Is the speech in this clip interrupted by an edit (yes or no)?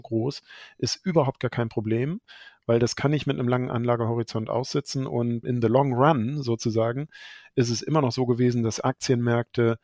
yes